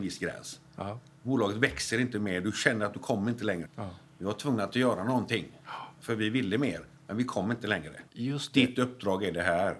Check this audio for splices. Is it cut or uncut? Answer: cut